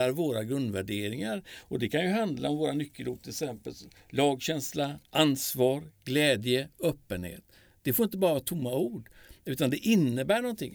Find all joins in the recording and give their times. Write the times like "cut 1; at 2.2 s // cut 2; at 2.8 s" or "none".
none